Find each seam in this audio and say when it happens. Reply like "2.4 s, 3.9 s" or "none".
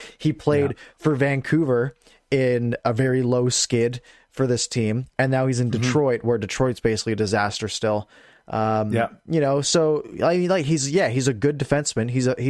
2.8 s